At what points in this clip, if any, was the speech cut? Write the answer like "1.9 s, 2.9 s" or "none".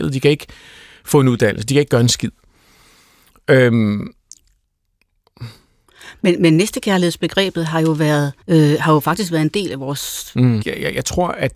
8.4 s, 10.6 s